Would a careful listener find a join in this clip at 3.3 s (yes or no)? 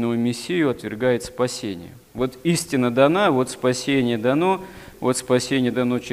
no